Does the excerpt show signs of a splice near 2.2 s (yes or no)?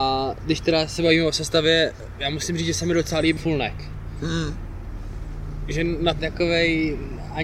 no